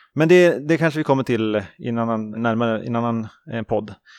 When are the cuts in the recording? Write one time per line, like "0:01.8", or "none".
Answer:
0:02.3